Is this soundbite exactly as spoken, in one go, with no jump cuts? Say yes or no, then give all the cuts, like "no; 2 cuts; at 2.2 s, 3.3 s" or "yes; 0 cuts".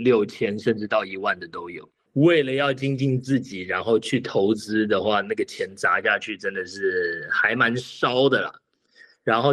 no; 1 cut; at 2.1 s